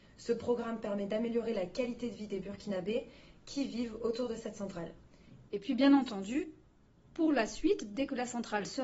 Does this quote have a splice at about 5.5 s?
yes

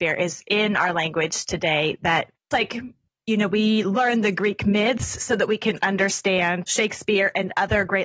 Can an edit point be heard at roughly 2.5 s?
yes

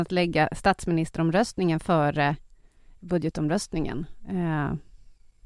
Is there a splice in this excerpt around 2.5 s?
no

